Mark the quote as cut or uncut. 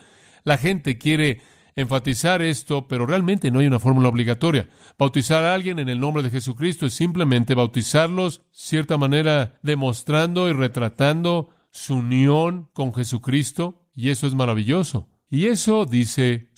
uncut